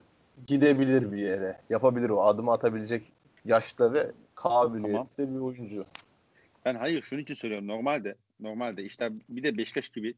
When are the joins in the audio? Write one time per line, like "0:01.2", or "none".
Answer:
none